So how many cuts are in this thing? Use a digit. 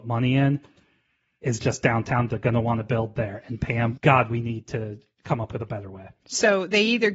2